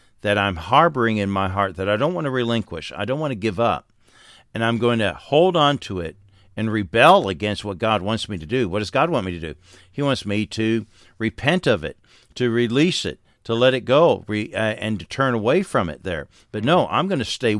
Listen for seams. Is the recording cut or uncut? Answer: uncut